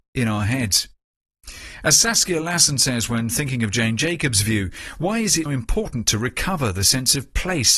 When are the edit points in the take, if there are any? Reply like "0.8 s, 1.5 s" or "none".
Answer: 5.5 s